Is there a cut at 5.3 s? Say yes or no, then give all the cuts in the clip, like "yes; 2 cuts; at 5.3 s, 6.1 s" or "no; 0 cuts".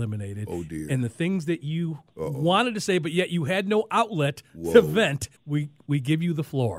yes; 1 cut; at 5.3 s